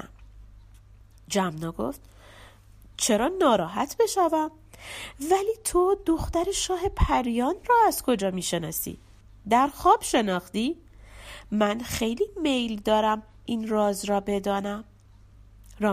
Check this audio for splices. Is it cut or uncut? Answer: uncut